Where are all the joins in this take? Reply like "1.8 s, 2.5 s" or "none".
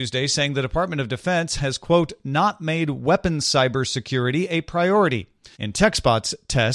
5.5 s